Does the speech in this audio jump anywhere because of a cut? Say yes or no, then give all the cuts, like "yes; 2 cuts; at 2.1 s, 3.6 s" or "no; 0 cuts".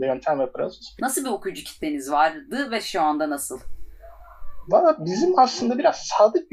yes; 1 cut; at 1.0 s